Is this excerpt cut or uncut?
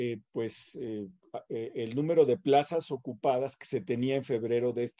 uncut